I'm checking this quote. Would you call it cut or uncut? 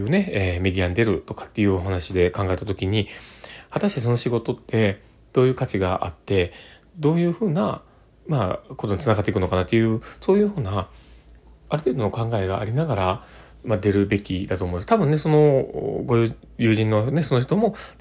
uncut